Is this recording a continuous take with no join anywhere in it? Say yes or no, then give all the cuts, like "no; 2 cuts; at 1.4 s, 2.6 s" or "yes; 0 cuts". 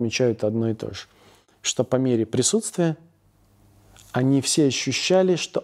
yes; 0 cuts